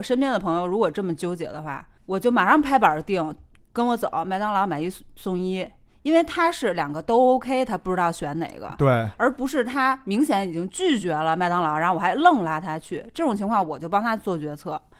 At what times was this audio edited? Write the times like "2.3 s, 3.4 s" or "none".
2.0 s